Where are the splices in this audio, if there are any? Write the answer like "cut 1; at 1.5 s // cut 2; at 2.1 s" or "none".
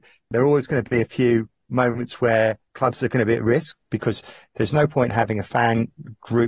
cut 1; at 2.7 s // cut 2; at 3.8 s